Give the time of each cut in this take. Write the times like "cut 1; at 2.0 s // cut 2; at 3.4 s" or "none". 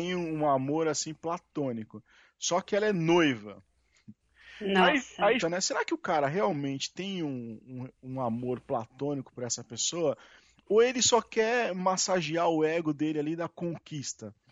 cut 1; at 5.4 s